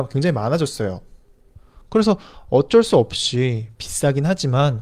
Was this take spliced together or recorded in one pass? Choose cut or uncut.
cut